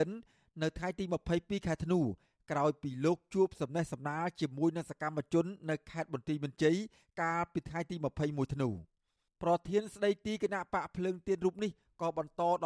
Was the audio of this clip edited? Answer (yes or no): no